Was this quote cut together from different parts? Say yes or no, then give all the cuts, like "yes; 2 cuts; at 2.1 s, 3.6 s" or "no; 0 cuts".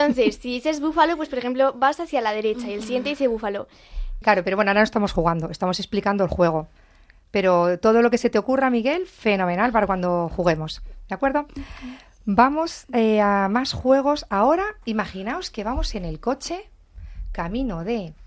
yes; 1 cut; at 4.2 s